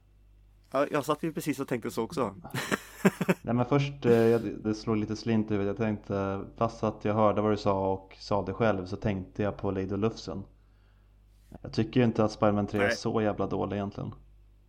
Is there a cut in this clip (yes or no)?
yes